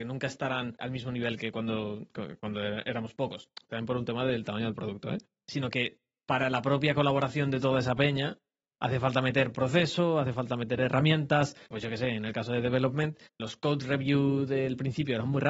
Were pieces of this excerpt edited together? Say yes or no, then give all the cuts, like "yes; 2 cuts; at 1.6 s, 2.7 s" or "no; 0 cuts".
yes; 2 cuts; at 11.7 s, 13.4 s